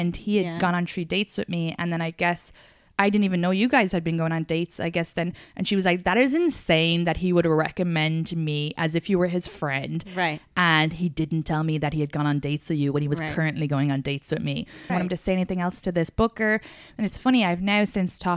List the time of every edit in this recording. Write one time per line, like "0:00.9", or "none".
0:14.9